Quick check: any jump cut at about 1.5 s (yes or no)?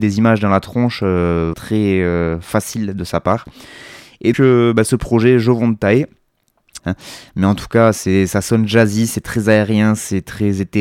yes